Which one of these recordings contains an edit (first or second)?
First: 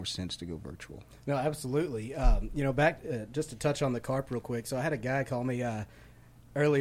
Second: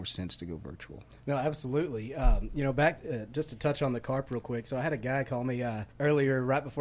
second